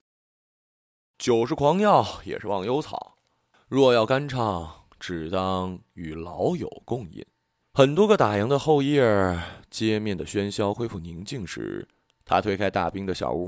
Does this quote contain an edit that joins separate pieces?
yes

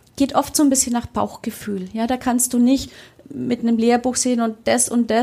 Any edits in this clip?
no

